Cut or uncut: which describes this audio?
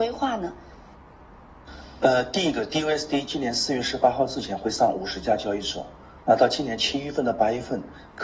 uncut